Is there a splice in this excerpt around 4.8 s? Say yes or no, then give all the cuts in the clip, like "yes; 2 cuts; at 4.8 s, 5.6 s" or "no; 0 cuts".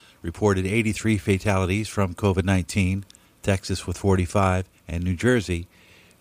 yes; 2 cuts; at 3.3 s, 4.8 s